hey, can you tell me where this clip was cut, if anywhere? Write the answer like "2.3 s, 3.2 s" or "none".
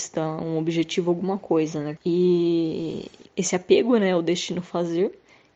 2.0 s, 3.3 s